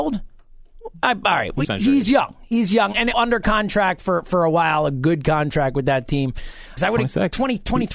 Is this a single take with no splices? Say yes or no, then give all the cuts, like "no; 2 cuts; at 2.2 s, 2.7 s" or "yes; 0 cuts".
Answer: no; 3 cuts; at 1.6 s, 3.1 s, 6.8 s